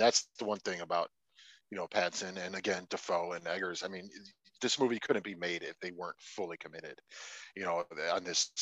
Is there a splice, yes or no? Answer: no